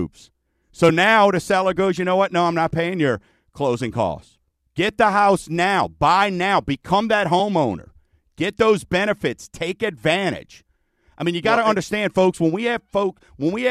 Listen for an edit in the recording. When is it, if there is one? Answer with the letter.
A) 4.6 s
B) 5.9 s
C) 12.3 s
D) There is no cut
A